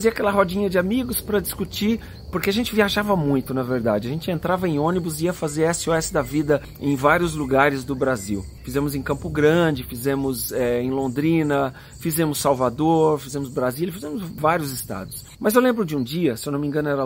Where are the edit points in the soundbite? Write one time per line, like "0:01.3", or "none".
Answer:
none